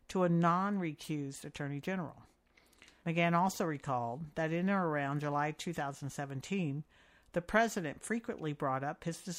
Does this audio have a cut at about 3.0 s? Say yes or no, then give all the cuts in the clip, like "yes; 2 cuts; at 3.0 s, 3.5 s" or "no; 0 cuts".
yes; 1 cut; at 3.0 s